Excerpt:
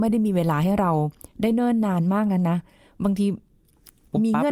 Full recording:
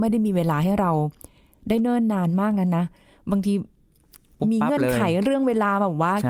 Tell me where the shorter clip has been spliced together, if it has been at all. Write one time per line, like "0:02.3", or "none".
0:01.3